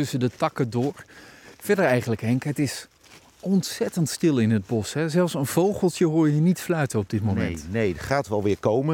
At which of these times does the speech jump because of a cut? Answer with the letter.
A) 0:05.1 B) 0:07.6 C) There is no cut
C